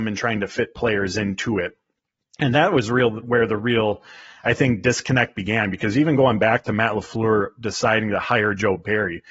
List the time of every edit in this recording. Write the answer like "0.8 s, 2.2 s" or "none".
none